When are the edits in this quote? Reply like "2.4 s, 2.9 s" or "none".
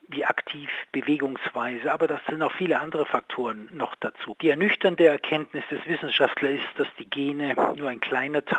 4.3 s